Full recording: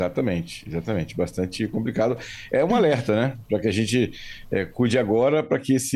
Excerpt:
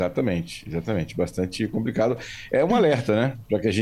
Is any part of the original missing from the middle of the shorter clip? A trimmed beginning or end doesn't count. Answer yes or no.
no